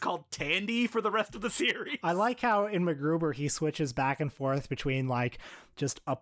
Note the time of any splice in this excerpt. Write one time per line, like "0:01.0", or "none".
none